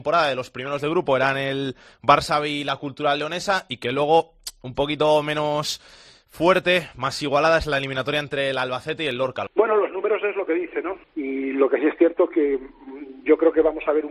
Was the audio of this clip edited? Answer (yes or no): yes